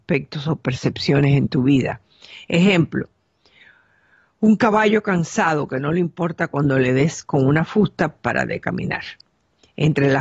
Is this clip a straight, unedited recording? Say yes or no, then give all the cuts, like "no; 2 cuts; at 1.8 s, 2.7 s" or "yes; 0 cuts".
yes; 0 cuts